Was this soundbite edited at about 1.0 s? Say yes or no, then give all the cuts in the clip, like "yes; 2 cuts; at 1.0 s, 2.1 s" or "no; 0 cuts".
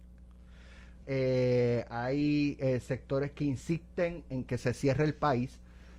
yes; 1 cut; at 1.0 s